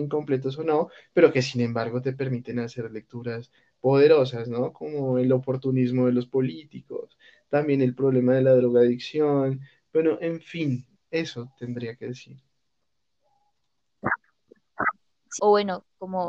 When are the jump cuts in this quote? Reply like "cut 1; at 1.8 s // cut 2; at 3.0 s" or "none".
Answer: cut 1; at 11.0 s // cut 2; at 15.4 s

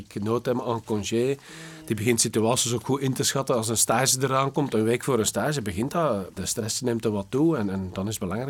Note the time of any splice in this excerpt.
cut 1; at 6.4 s

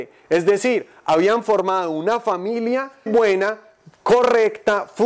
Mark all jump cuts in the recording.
cut 1; at 3.1 s

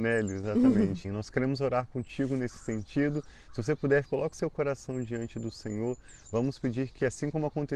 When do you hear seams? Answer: cut 1; at 1.0 s // cut 2; at 4.0 s

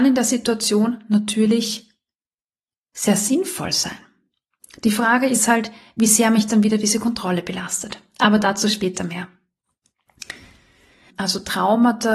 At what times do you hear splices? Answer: cut 1; at 11.1 s

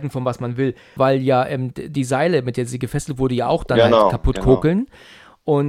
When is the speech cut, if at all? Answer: cut 1; at 1.0 s

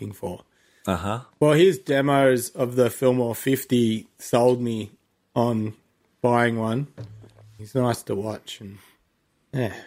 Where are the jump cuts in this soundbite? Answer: cut 1; at 1.3 s // cut 2; at 7.6 s

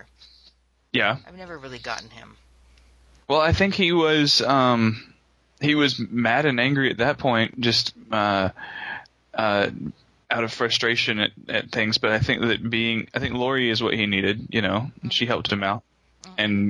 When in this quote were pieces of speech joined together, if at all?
none

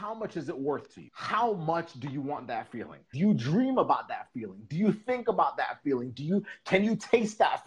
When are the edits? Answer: cut 1; at 3.1 s

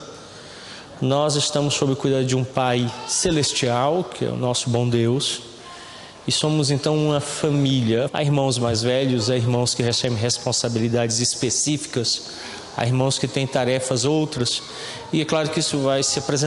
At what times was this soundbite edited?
cut 1; at 8.1 s

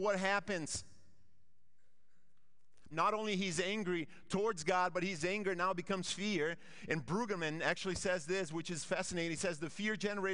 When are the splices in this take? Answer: cut 1; at 2.9 s

